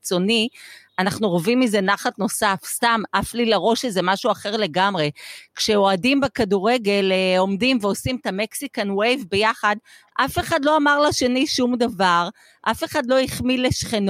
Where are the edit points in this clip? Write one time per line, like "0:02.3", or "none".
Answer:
none